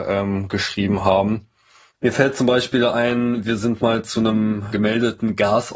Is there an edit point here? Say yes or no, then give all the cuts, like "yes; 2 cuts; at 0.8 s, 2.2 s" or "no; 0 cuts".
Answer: yes; 1 cut; at 4.7 s